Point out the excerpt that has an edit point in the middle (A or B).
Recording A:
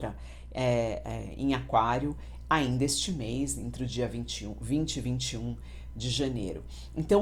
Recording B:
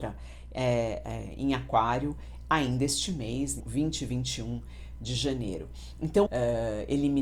B